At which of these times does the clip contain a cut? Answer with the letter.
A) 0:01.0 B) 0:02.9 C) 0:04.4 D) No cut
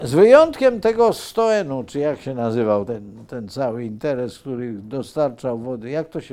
D